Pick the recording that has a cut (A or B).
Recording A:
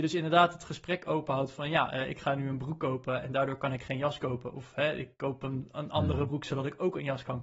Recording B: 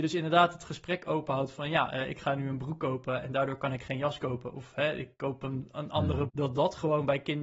B